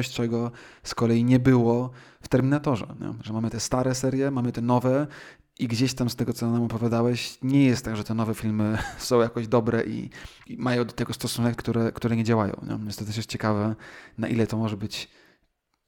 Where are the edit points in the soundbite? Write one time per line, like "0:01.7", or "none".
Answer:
0:10.5
0:11.6